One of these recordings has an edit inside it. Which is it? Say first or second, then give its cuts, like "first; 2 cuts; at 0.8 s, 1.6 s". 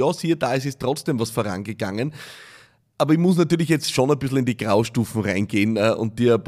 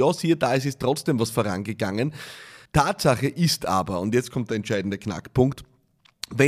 second; 1 cut; at 2.7 s